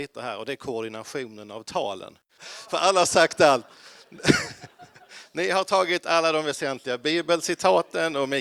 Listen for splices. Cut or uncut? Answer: cut